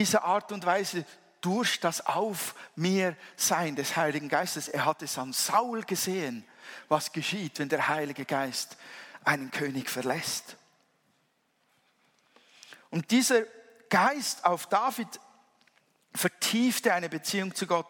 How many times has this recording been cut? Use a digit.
0